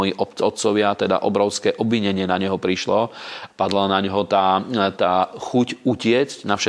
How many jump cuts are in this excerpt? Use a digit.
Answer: 2